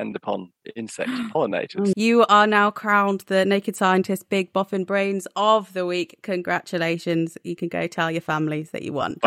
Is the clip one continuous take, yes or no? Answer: no